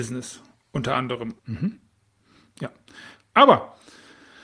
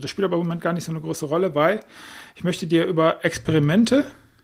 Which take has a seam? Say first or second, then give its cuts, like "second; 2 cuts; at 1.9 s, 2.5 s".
first; 2 cuts; at 1.4 s, 3.3 s